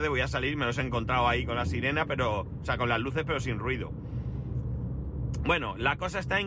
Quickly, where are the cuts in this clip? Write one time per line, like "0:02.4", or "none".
none